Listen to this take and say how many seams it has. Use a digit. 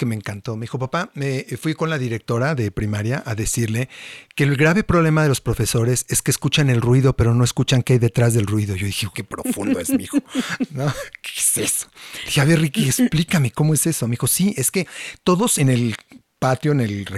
2